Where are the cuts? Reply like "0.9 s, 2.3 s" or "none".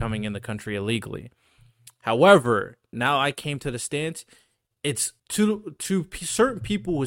2.9 s, 5.2 s